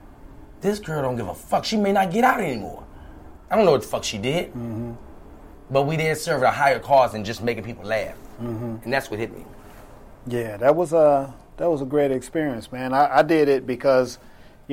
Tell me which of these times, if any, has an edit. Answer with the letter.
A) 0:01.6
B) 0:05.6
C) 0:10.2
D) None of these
D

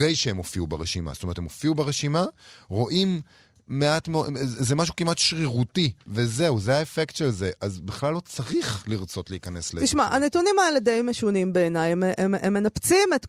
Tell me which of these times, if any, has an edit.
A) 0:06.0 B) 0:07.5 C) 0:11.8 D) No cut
A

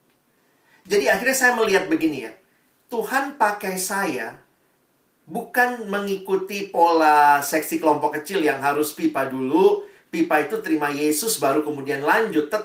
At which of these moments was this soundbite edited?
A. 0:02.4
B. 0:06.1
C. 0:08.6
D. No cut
D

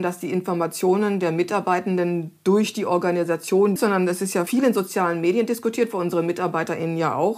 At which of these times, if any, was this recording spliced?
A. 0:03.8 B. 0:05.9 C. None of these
A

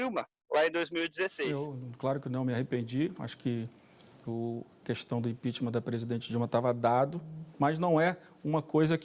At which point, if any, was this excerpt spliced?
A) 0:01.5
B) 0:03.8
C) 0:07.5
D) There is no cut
C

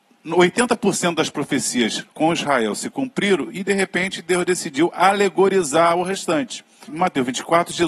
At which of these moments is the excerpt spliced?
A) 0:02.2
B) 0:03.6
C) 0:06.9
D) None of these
C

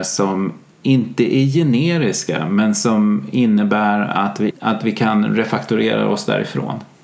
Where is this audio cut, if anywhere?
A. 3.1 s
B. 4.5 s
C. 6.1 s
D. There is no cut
B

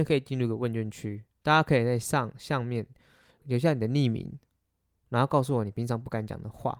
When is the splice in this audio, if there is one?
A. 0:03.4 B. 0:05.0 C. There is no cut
A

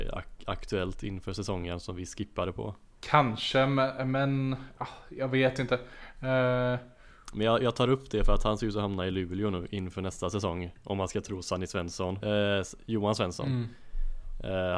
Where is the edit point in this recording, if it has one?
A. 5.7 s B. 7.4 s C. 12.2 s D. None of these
C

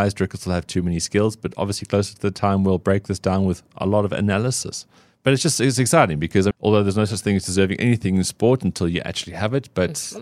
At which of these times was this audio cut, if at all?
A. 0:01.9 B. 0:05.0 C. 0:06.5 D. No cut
C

